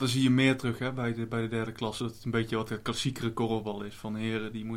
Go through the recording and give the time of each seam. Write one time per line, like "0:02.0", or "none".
none